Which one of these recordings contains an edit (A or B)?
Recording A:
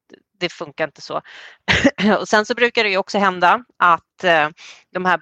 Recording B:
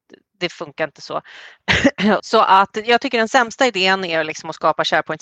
B